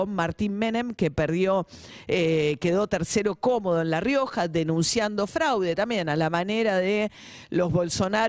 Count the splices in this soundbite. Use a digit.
0